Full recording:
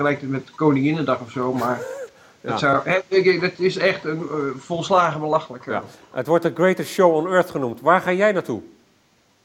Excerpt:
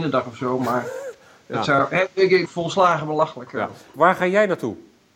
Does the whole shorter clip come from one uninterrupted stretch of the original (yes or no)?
no